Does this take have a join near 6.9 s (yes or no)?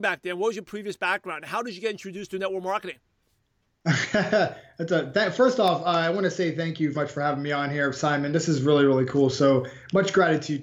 yes